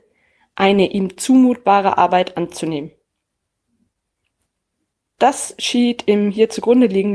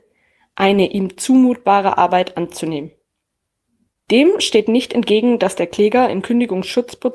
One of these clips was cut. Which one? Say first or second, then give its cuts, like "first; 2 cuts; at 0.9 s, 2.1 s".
second; 1 cut; at 4.0 s